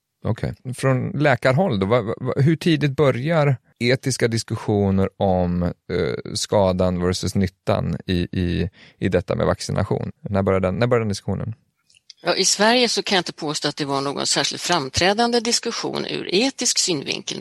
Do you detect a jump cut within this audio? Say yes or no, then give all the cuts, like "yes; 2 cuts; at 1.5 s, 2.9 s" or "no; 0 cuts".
yes; 1 cut; at 10.3 s